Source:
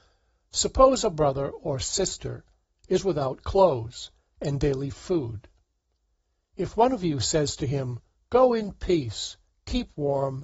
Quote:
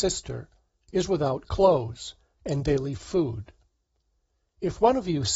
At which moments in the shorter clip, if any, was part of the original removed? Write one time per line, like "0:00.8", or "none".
none